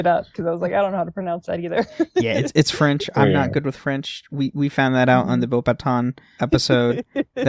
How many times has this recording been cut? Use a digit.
1